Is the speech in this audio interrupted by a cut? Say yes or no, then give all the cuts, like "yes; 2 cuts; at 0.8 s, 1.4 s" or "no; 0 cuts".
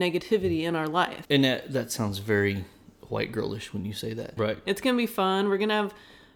yes; 2 cuts; at 1.2 s, 4.4 s